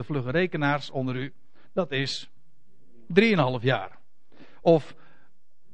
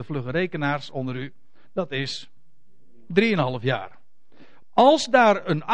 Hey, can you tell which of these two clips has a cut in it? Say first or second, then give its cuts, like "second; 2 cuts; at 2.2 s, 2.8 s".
second; 1 cut; at 4.6 s